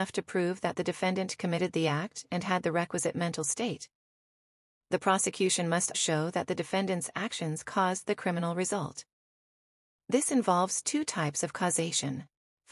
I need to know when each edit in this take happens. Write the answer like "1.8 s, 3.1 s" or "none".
5.9 s